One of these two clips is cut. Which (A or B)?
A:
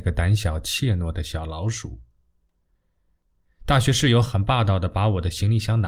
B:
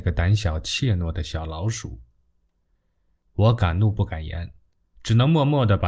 B